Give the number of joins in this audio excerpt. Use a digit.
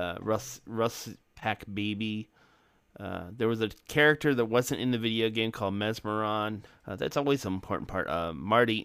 2